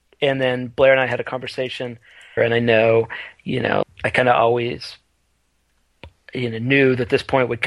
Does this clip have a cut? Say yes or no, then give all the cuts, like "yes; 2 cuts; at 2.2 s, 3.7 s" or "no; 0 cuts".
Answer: yes; 2 cuts; at 2.4 s, 3.8 s